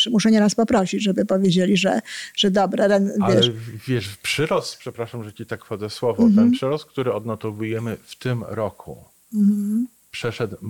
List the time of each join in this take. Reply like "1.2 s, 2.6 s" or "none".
none